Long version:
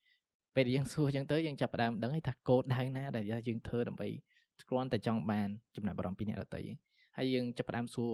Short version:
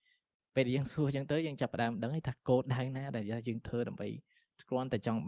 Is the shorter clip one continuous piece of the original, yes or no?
yes